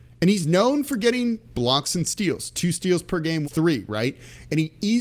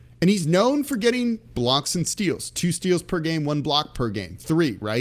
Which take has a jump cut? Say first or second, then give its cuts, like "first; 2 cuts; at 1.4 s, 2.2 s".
first; 1 cut; at 3.4 s